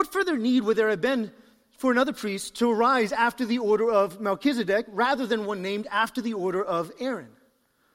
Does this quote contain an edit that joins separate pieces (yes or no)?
no